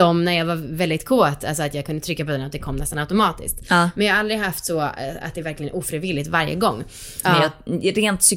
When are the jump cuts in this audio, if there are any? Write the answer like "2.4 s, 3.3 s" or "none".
7.2 s

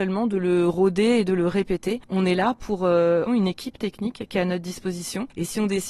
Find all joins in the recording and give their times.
3.3 s

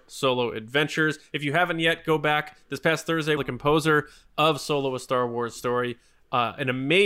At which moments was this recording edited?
3.4 s

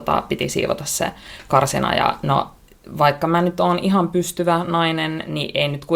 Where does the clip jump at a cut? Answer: none

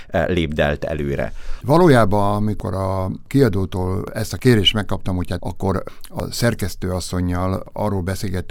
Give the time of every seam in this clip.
1.6 s, 5.4 s

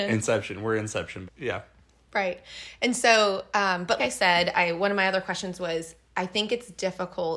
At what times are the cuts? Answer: 1.3 s, 4.0 s

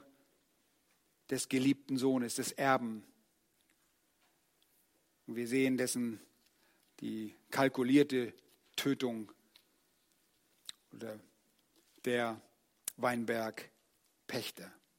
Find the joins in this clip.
none

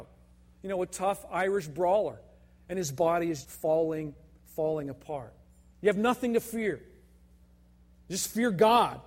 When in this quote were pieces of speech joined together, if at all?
3.4 s, 5.7 s

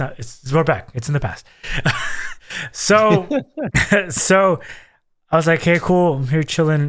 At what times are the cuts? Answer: 0.9 s

